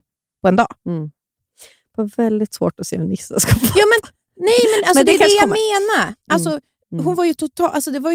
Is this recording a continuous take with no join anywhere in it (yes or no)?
yes